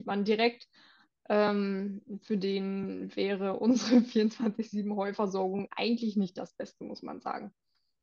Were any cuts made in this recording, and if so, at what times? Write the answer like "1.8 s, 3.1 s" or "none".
none